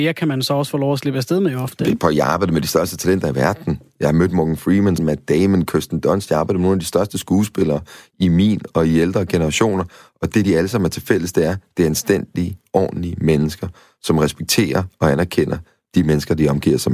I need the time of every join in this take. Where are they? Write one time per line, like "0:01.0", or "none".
0:05.0